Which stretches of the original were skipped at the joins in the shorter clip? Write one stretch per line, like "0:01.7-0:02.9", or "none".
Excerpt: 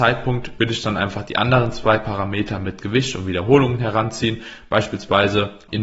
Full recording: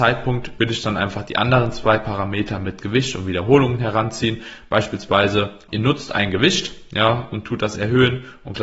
none